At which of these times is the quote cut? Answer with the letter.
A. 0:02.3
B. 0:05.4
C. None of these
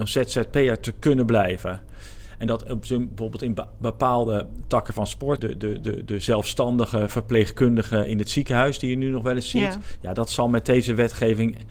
B